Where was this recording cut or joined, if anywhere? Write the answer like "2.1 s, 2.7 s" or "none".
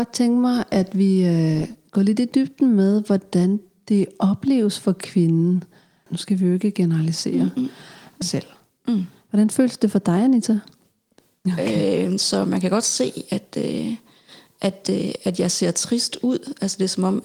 6.1 s, 8.2 s, 11.5 s